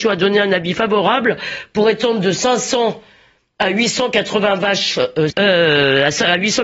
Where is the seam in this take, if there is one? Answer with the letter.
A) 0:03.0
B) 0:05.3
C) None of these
B